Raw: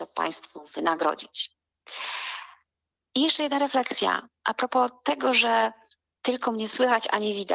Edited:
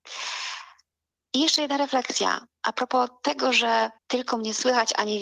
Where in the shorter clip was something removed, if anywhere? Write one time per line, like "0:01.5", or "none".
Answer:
0:04.0